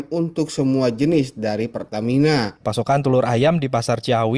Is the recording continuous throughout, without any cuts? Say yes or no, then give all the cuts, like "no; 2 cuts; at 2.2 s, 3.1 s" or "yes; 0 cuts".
no; 1 cut; at 2.6 s